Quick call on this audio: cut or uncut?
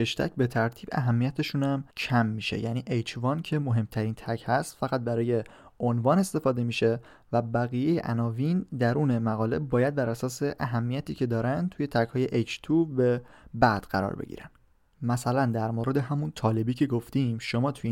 cut